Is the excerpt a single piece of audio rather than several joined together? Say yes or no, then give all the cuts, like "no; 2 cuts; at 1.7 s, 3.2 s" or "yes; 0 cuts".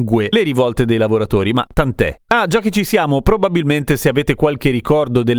no; 1 cut; at 2.3 s